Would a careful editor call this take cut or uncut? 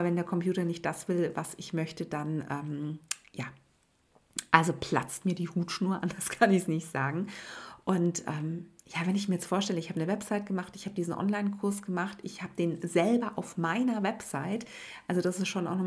uncut